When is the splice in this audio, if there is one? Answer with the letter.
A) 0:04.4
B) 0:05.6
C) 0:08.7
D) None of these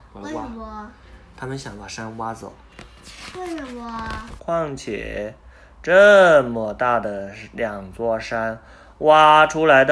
A